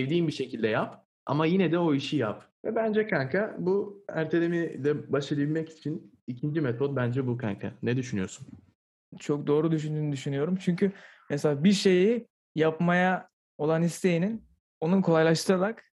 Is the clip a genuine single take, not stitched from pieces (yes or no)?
no